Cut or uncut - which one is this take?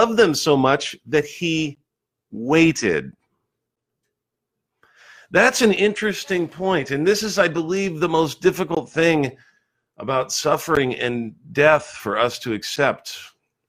uncut